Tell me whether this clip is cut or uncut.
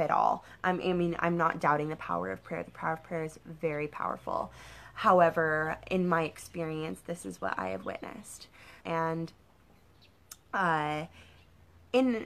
cut